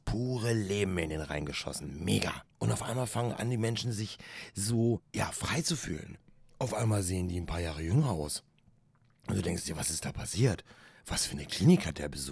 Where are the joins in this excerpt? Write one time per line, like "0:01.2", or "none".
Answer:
0:02.5